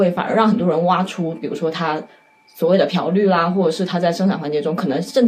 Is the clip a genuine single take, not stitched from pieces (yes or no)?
yes